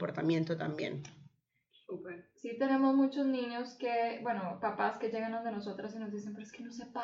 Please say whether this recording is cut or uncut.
uncut